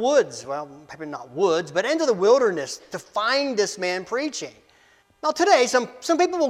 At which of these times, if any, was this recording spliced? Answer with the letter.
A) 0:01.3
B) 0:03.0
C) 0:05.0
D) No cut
C